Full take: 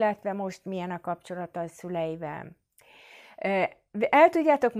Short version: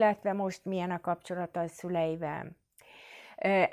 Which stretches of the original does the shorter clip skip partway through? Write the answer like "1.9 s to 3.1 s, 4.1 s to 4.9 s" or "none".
none